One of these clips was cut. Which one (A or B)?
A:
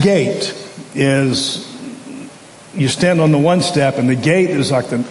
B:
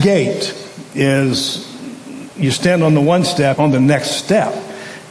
B